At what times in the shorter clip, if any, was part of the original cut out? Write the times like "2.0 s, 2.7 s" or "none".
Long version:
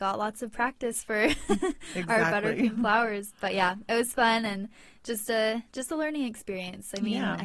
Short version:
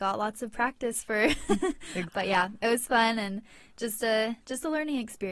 2.1 s